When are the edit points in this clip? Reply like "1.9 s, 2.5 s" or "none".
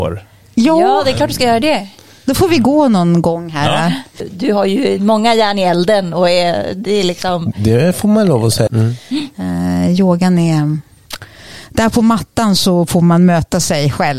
8.7 s